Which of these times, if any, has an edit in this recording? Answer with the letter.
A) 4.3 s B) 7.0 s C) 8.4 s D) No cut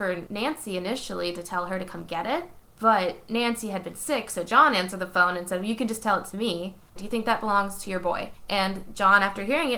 B